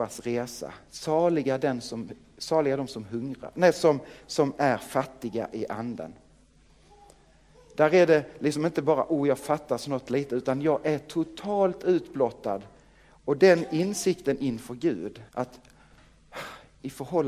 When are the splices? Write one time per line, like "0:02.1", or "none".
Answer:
0:13.0
0:15.3